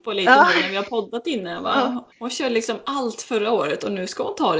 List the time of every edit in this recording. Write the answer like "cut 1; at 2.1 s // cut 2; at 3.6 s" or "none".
cut 1; at 2.1 s